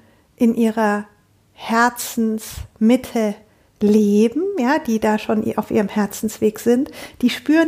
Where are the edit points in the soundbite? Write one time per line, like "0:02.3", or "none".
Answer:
none